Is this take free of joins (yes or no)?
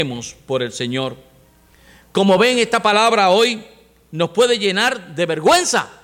yes